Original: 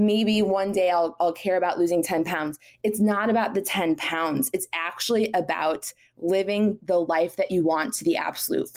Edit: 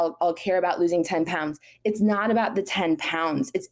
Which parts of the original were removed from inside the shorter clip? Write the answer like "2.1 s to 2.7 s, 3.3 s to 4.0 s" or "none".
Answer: none